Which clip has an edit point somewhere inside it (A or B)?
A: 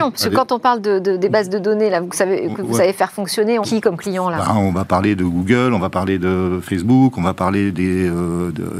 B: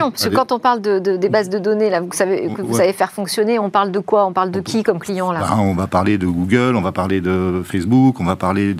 A